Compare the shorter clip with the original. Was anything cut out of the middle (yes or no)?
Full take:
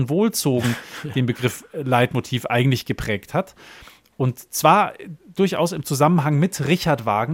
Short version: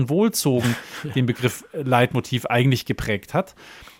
no